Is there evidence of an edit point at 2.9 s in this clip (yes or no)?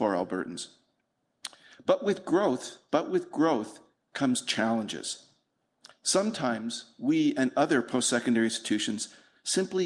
yes